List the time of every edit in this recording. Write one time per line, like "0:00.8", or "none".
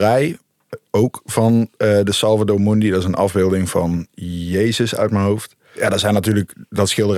none